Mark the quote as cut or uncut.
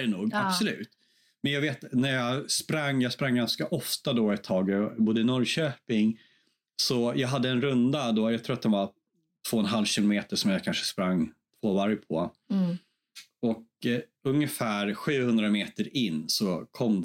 uncut